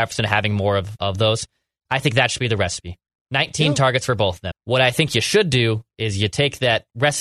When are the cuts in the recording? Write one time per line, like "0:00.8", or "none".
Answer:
0:01.0
0:04.5